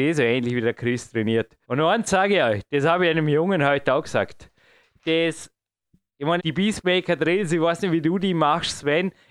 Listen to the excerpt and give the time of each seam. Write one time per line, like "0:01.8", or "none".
0:01.6
0:06.4